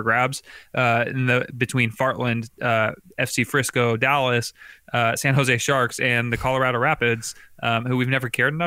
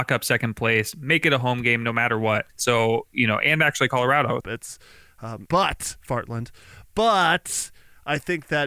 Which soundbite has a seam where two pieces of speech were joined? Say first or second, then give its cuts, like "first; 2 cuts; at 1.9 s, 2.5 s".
second; 3 cuts; at 2.5 s, 4.4 s, 5.5 s